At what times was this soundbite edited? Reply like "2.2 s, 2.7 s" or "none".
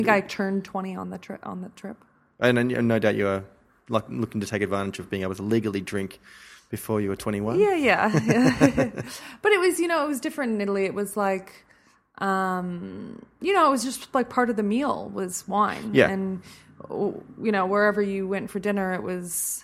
none